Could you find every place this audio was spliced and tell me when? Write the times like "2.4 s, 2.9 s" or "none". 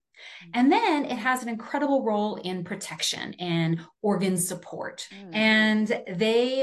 5.1 s